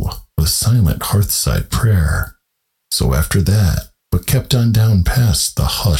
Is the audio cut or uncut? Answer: cut